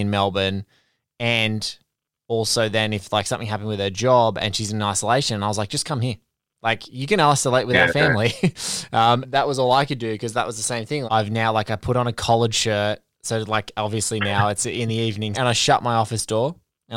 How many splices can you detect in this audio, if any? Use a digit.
3